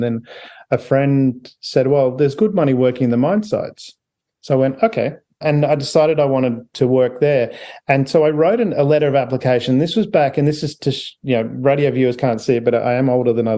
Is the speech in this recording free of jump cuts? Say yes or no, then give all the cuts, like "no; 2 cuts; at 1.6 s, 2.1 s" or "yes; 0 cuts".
no; 1 cut; at 5.4 s